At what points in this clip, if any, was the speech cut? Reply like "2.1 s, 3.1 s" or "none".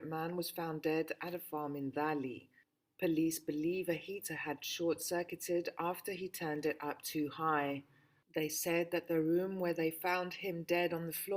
none